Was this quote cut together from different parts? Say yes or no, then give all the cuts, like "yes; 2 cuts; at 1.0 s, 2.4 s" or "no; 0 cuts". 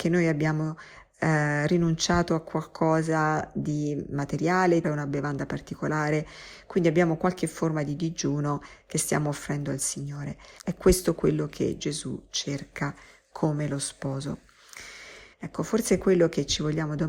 yes; 3 cuts; at 4.8 s, 10.6 s, 15.3 s